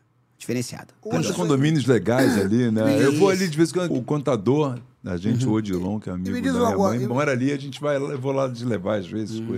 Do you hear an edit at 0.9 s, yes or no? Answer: no